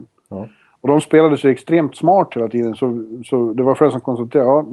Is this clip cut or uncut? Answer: uncut